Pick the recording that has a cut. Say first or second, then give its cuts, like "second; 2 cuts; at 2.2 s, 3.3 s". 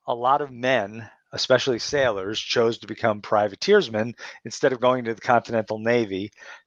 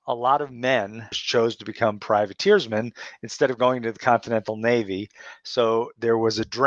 second; 1 cut; at 1.1 s